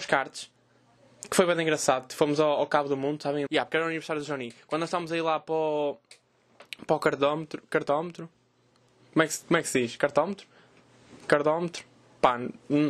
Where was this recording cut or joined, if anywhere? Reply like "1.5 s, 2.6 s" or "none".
3.5 s